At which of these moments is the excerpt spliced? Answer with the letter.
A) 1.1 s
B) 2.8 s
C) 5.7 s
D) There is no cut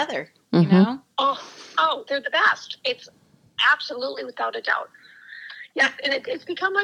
D